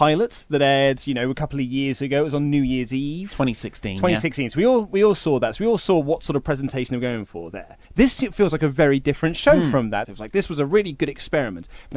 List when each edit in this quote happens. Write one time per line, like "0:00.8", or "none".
0:07.8
0:10.0